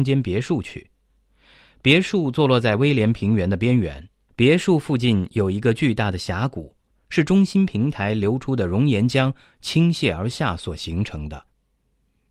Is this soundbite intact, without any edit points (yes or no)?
no